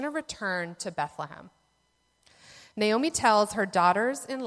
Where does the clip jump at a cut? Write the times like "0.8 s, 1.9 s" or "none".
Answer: none